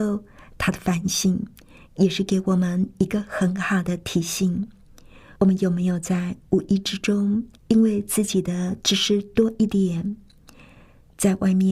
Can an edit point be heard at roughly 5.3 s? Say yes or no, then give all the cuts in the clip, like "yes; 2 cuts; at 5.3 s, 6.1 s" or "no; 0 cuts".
yes; 2 cuts; at 5.3 s, 7.6 s